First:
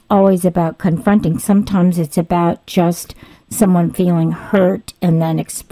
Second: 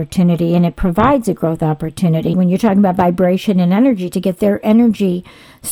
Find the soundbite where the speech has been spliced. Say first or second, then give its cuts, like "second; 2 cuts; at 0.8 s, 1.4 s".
second; 1 cut; at 2.3 s